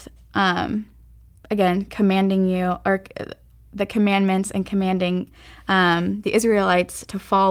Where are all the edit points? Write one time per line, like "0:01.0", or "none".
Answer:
0:01.3